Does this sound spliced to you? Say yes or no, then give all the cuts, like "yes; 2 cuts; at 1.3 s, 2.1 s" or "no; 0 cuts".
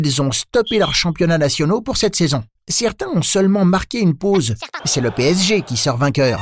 yes; 2 cuts; at 2.6 s, 4.8 s